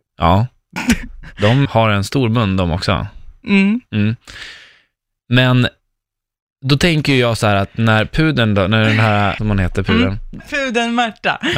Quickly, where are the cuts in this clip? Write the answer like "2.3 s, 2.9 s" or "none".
1.6 s, 9.4 s, 10.4 s